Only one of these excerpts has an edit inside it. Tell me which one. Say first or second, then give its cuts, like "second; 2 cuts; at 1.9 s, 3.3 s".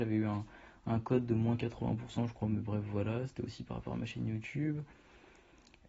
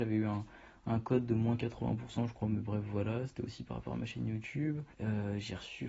second; 1 cut; at 4.9 s